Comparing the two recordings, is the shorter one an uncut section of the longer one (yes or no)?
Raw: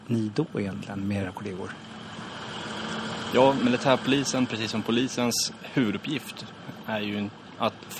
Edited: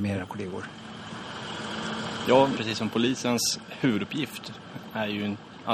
no